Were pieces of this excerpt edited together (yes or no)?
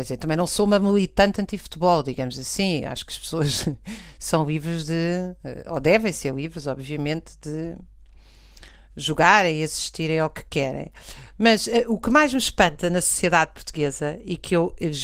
yes